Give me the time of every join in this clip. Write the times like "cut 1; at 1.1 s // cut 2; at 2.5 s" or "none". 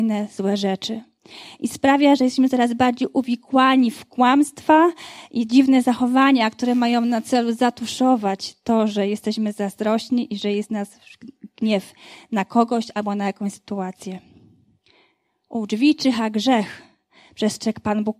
none